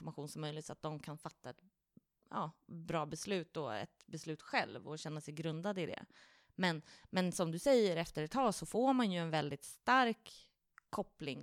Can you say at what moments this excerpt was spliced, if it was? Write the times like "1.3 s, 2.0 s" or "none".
none